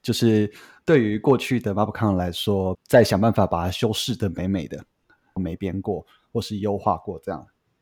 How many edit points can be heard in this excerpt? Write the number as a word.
two